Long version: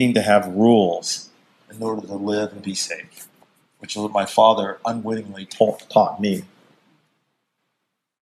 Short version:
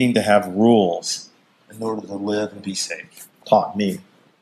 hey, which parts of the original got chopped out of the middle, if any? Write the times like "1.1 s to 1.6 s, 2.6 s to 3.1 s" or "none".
3.4 s to 5.9 s